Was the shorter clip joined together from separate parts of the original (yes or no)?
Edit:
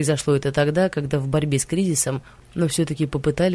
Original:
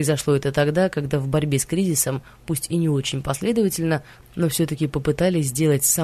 yes